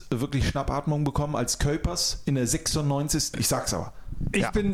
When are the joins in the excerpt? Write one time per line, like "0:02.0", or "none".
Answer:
0:03.3